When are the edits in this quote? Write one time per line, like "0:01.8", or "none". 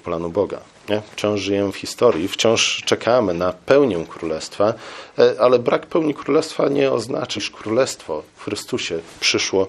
0:07.4